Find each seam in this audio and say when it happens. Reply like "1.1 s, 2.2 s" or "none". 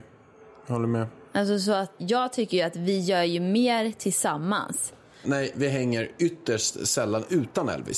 2.0 s, 5.2 s